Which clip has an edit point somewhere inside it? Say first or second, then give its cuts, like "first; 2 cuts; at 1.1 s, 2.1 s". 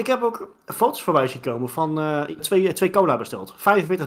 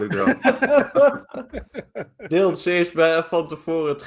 first; 1 cut; at 2.4 s